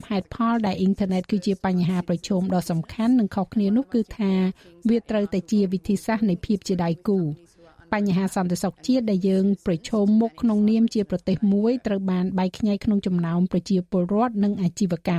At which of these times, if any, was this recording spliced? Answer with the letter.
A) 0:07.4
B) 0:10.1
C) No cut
C